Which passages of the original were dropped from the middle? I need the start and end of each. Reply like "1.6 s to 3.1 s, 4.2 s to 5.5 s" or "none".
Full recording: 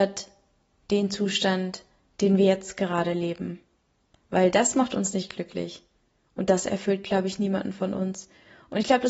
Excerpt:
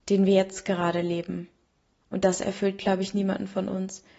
4.1 s to 6.3 s

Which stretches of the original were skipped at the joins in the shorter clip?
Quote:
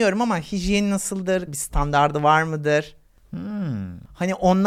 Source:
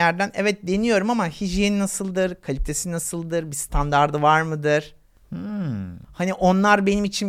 2.4 s to 3.5 s

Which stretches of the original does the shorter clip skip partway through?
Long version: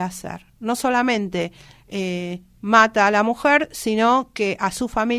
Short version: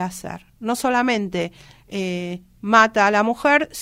none

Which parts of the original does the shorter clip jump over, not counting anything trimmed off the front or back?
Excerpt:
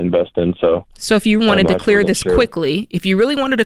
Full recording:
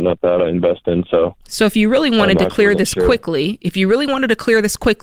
1.9 s to 2.1 s

